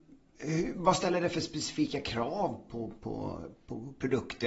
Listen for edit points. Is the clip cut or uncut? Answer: uncut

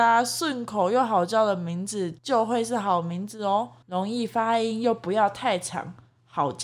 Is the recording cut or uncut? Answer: uncut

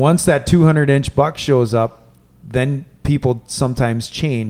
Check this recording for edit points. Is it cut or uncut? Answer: uncut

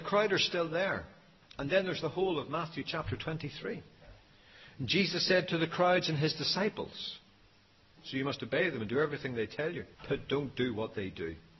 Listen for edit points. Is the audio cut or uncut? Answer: cut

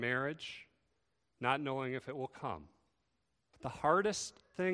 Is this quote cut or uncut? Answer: cut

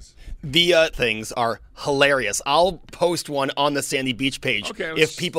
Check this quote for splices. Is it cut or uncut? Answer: cut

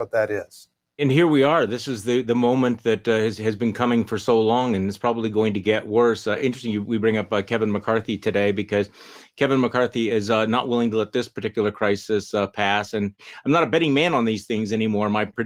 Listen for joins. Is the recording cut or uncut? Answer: uncut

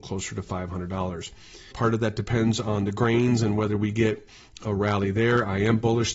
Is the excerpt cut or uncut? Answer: cut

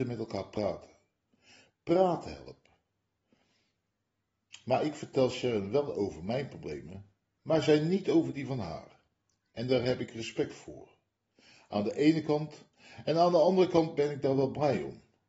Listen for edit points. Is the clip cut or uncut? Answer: uncut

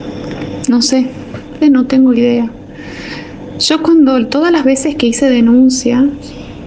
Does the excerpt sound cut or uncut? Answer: cut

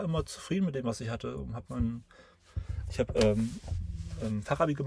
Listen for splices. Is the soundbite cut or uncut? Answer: uncut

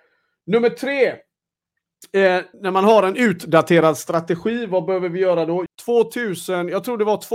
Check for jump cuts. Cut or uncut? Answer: cut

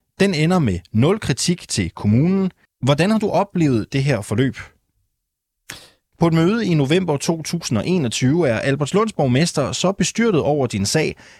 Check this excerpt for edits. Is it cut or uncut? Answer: cut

